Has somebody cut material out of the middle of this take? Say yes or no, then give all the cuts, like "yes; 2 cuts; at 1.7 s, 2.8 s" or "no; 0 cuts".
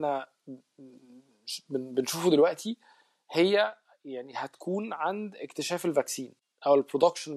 no; 0 cuts